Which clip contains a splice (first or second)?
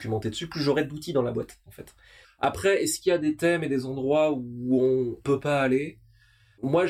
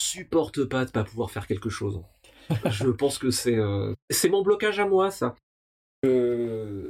first